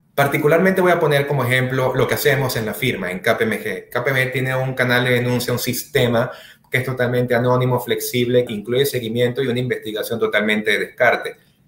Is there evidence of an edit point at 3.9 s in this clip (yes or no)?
no